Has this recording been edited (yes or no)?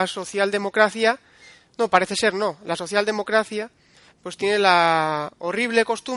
no